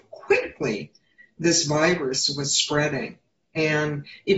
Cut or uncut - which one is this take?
uncut